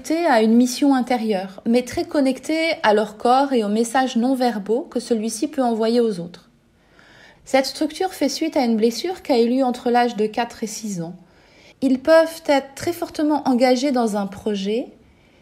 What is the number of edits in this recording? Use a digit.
2